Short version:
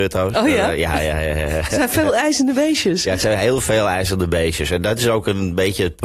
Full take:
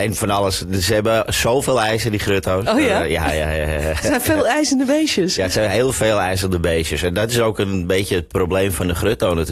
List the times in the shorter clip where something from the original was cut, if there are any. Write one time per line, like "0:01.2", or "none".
none